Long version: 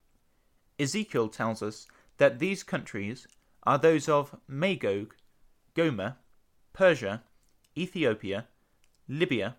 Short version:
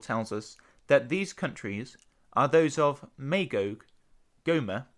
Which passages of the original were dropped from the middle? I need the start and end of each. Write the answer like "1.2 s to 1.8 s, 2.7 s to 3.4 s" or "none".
none

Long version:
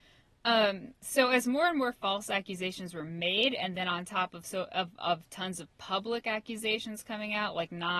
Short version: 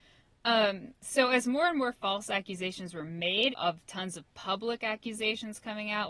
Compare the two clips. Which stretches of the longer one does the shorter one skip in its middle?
3.5 s to 4.9 s

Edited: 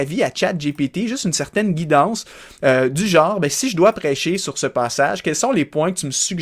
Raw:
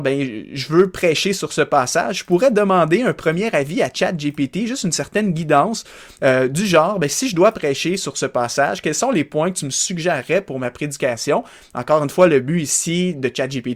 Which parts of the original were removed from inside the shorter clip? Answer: none

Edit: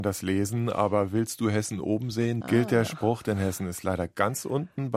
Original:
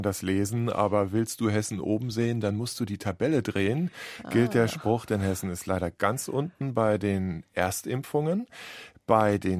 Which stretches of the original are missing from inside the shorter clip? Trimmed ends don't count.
2.4 s to 4.2 s

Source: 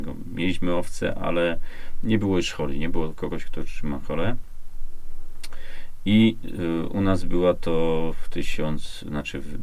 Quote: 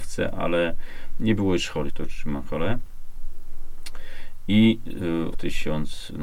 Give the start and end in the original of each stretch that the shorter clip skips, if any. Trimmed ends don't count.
2.7 s to 3.4 s, 6.9 s to 8.2 s

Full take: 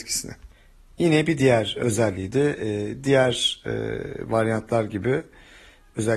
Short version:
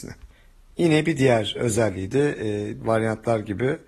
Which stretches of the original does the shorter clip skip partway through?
3.0 s to 4.3 s

